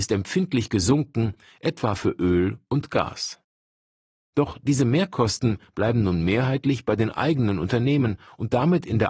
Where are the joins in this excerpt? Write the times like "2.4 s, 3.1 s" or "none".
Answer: 4.2 s